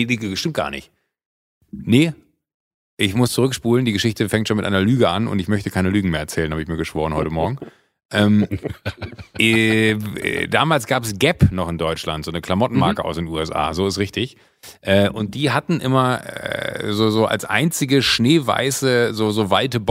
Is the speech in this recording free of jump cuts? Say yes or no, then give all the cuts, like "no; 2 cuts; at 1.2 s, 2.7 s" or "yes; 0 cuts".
yes; 0 cuts